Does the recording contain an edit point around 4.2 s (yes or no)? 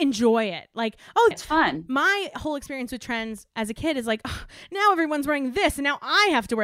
no